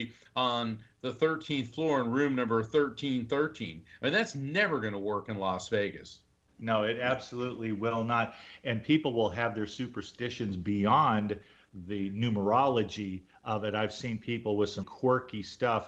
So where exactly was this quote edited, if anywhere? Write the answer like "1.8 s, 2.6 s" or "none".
6.5 s, 14.8 s